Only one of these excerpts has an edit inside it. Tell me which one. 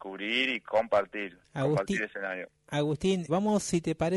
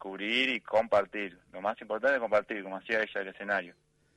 first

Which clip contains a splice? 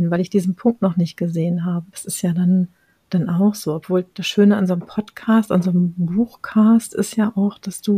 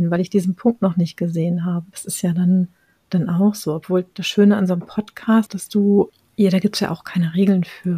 second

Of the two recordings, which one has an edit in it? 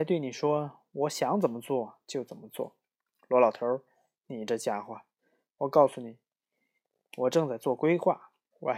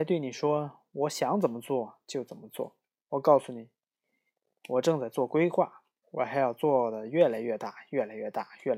second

